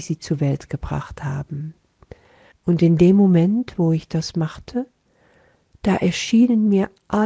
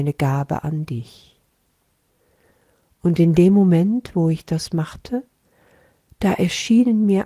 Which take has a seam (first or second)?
first